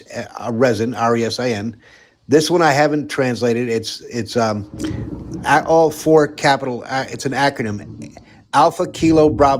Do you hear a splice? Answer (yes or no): no